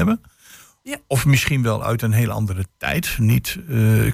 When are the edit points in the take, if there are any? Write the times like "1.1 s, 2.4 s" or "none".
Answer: none

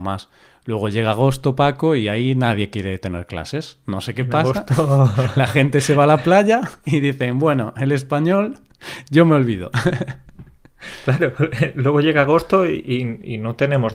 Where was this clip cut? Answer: none

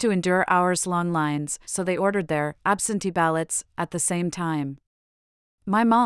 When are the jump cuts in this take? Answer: 1.6 s

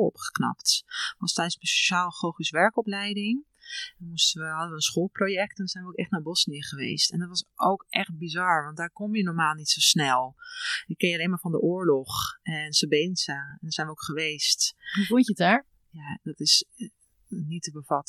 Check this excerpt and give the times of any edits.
none

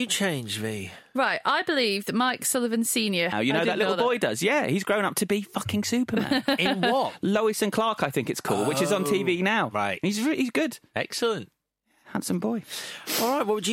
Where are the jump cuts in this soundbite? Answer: 3.3 s

